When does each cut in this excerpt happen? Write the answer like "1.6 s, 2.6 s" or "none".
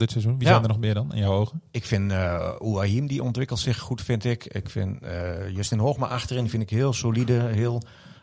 none